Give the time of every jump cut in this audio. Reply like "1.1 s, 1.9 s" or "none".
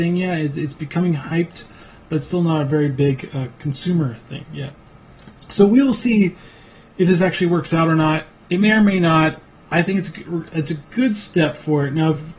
none